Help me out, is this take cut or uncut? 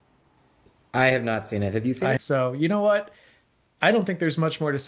cut